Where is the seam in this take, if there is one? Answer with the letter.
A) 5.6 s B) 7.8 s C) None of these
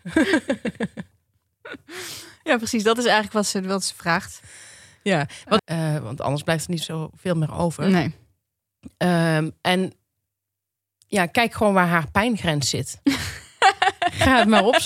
A